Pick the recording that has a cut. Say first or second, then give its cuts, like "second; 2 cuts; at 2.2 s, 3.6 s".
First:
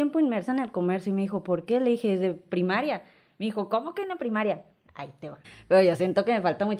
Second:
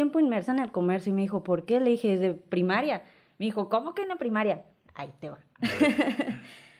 first; 1 cut; at 5.4 s